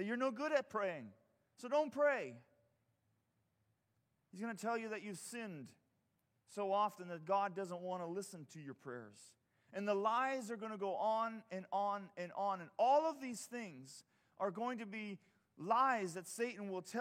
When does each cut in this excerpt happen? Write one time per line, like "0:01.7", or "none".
none